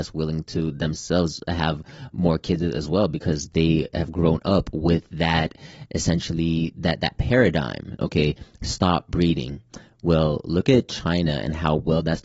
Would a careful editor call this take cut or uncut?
cut